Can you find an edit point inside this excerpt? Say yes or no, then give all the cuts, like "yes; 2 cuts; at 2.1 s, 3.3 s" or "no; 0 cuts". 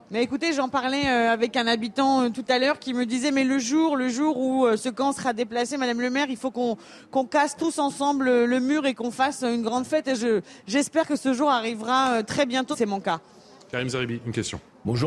yes; 1 cut; at 12.7 s